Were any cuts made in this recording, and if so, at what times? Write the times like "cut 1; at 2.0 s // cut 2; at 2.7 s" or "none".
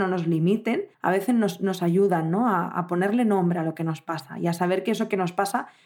cut 1; at 0.9 s